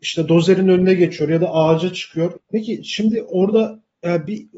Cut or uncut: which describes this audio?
cut